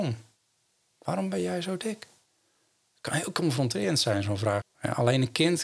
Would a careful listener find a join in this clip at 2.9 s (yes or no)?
no